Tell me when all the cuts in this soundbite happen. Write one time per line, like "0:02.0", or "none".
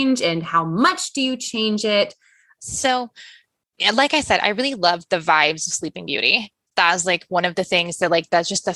0:02.6